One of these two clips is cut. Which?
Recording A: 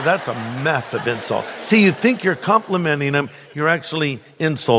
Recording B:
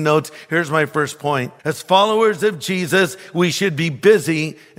B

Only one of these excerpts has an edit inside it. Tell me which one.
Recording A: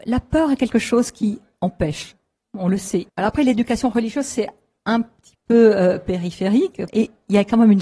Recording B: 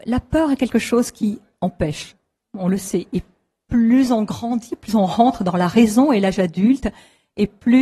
A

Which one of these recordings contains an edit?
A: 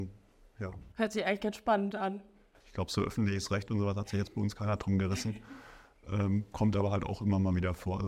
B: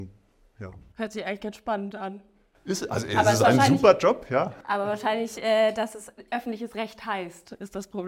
A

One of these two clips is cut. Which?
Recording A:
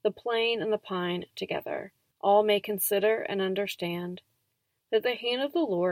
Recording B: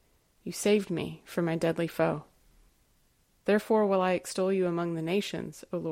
A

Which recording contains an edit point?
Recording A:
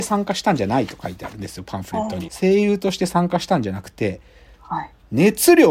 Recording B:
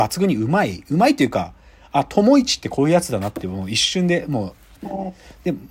A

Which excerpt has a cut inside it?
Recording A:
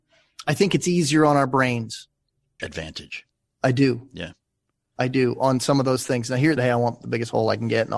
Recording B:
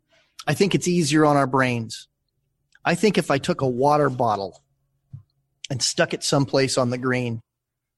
A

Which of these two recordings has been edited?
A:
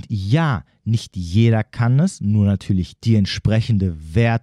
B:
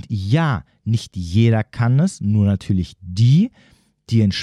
A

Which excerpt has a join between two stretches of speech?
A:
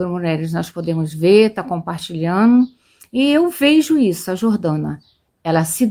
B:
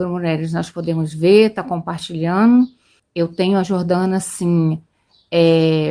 B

